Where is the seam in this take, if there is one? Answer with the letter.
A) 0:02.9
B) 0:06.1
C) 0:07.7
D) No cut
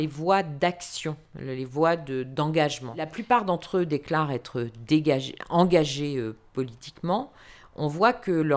D